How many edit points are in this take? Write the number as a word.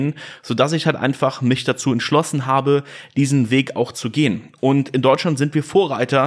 zero